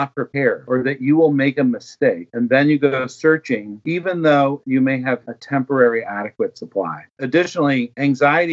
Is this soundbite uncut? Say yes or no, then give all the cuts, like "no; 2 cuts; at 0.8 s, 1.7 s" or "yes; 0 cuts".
no; 1 cut; at 7.2 s